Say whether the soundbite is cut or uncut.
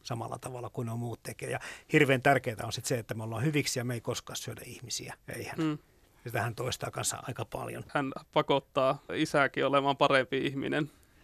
cut